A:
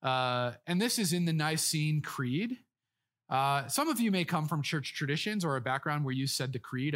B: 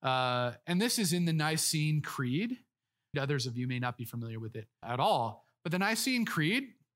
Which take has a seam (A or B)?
B